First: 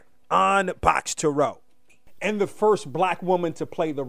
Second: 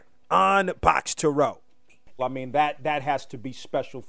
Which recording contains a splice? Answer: second; 1 cut; at 2.2 s

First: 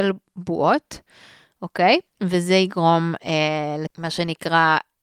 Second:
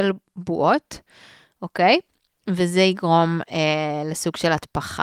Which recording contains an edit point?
first; 2 cuts; at 2.1 s, 3.9 s

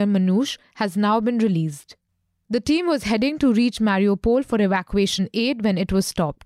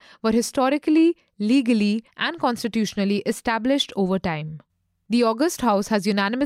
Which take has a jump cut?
second; 1 cut; at 2.1 s

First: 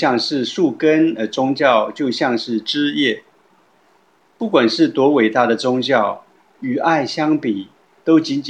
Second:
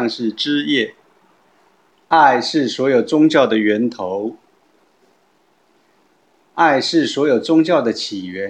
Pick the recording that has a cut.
second; 1 cut; at 1.9 s

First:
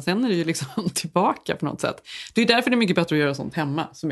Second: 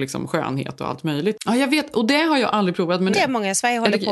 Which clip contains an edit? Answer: second; 2 cuts; at 1.4 s, 3.1 s

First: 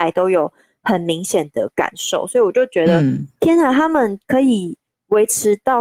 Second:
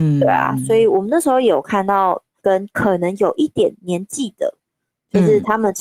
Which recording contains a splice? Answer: second; 2 cuts; at 2.4 s, 3.5 s

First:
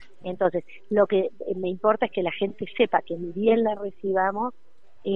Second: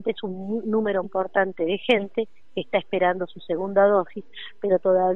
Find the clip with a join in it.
second; 1 cut; at 1.0 s

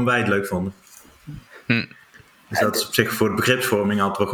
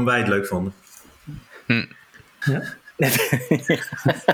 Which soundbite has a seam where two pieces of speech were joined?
second; 1 cut; at 2.4 s

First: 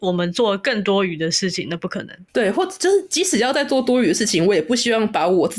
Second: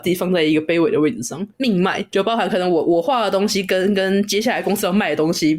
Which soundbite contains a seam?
second; 1 cut; at 1.5 s

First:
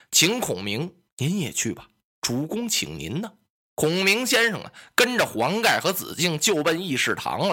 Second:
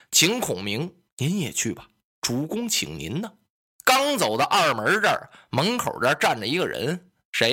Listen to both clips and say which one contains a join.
second; 1 cut; at 3.6 s

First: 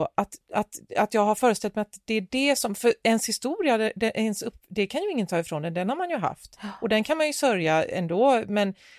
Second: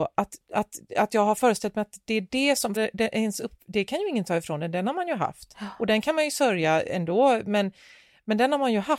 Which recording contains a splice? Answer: second; 1 cut; at 2.8 s

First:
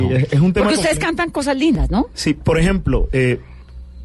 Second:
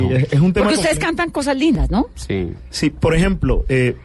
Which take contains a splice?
first; 1 cut; at 2.1 s

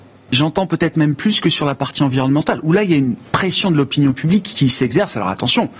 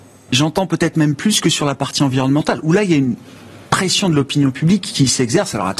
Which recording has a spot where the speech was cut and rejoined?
first; 1 cut; at 3.3 s

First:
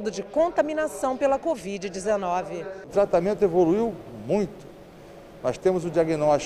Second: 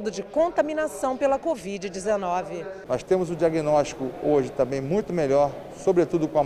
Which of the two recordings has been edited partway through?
second; 1 cut; at 2.9 s

